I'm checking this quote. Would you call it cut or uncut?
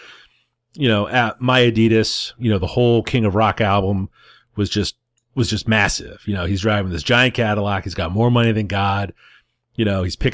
uncut